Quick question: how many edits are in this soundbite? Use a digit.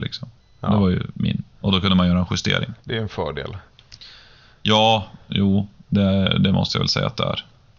1